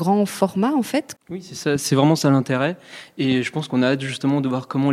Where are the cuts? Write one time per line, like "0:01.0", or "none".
0:01.2